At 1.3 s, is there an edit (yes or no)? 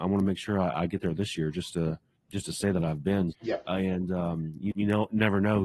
no